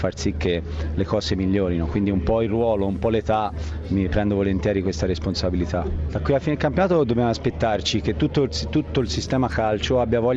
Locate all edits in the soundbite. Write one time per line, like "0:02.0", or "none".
0:06.1